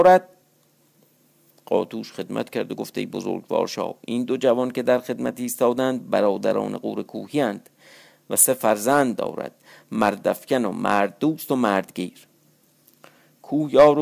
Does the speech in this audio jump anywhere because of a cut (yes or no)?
no